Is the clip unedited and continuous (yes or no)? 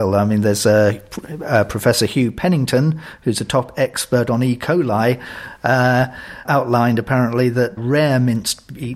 no